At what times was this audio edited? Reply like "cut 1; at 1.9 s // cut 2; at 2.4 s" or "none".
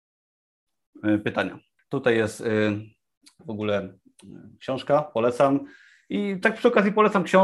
cut 1; at 1.8 s